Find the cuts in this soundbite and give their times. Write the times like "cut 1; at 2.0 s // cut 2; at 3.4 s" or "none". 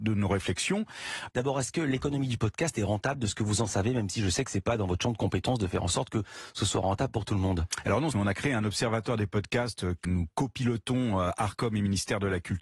cut 1; at 1.3 s // cut 2; at 8.1 s // cut 3; at 10.0 s